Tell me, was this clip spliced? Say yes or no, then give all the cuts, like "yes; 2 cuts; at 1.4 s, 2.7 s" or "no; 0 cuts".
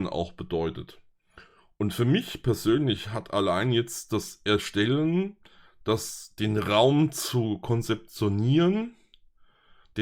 no; 0 cuts